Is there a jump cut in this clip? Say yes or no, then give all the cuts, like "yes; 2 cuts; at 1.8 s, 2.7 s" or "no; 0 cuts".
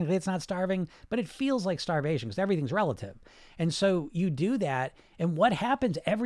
no; 0 cuts